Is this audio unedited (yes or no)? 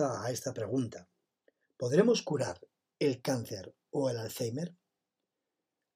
yes